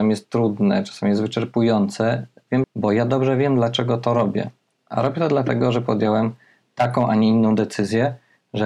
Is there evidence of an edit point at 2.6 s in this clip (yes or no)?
yes